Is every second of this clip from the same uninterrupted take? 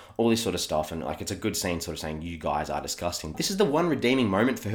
no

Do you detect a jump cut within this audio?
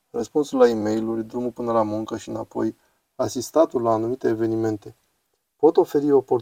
no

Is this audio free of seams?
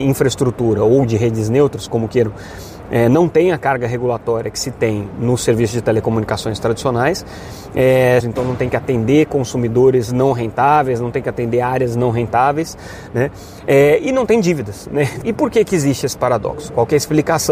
no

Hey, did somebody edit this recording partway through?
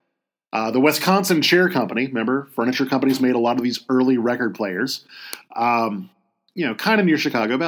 yes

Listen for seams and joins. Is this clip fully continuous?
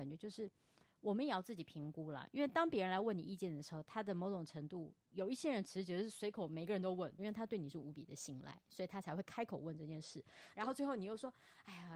no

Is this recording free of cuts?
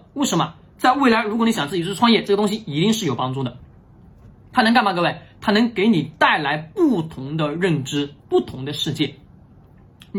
yes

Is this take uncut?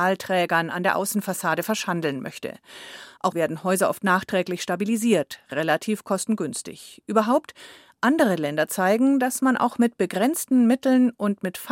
no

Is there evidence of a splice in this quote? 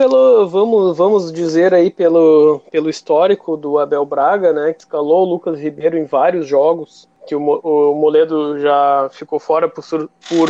no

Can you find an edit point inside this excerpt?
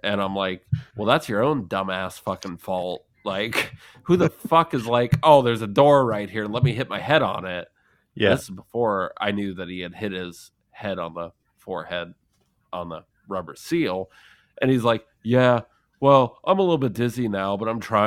no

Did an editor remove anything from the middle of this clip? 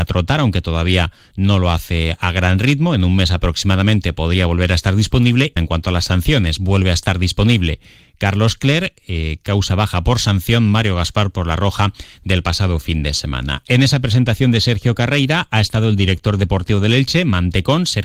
yes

